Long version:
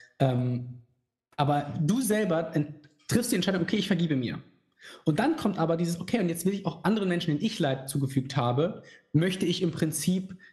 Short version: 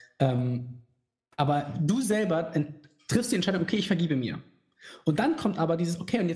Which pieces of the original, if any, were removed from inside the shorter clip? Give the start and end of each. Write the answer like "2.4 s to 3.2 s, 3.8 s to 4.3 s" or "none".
none